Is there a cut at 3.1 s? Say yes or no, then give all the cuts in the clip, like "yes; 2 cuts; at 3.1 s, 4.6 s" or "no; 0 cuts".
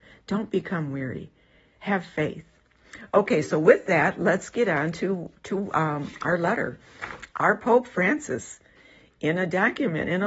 no; 1 cut; at 7.3 s